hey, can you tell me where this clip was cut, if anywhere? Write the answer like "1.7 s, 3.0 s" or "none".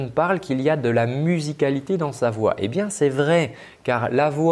none